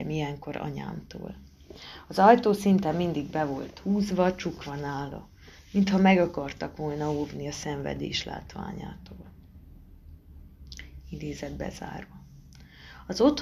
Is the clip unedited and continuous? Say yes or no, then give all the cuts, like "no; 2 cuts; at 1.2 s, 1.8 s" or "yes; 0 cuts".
yes; 0 cuts